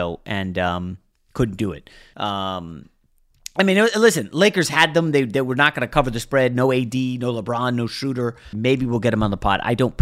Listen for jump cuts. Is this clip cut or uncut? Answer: cut